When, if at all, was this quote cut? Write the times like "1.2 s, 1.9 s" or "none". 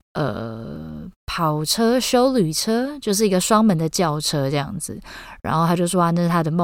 1.2 s

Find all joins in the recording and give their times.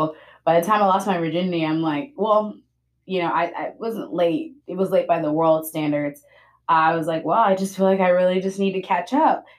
none

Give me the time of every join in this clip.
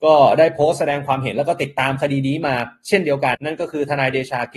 3.3 s

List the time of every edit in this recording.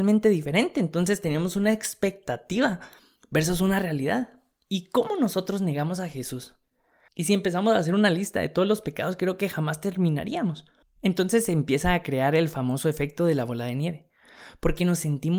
7.1 s, 11.0 s

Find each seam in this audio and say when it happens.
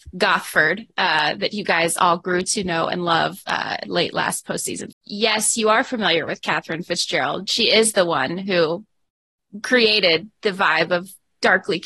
4.9 s

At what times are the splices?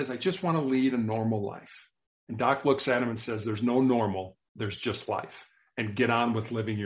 none

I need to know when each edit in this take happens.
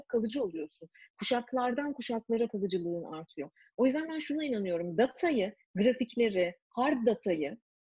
none

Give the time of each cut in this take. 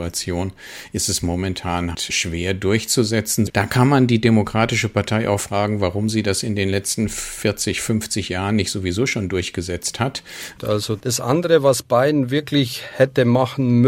1.9 s, 3.5 s, 10.6 s

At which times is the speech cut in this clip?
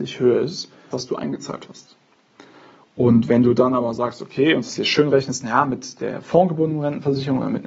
0.9 s

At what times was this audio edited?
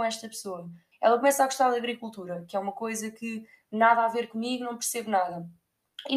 0.9 s

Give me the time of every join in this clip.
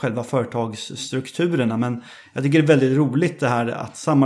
none

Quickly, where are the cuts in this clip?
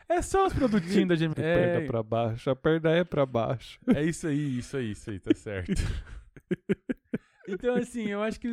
1.3 s

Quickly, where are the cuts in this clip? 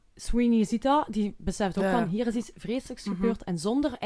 none

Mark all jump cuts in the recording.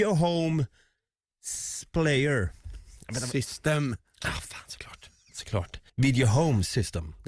5.9 s

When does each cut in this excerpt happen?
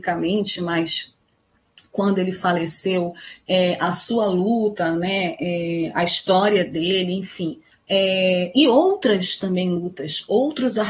7.7 s

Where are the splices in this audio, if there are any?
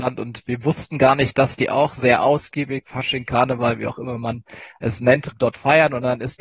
2.8 s, 5.3 s

